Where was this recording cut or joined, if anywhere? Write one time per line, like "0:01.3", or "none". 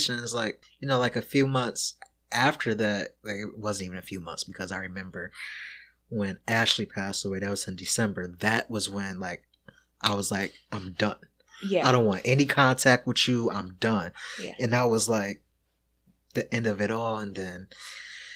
none